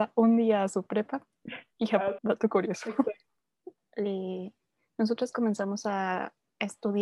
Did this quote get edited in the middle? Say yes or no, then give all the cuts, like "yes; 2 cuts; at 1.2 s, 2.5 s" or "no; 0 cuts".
yes; 2 cuts; at 2.2 s, 3.8 s